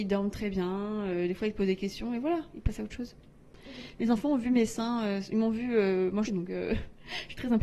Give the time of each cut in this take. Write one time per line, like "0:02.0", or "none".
0:06.3